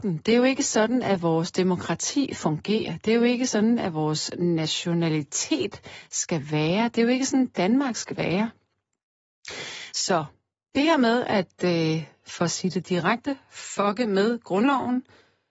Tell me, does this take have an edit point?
no; 0 cuts

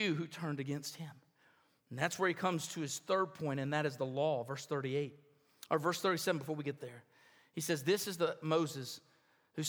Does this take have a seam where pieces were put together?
no; 0 cuts

